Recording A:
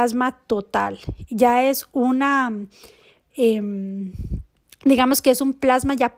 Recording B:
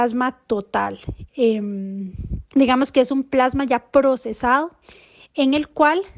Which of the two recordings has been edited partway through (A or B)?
B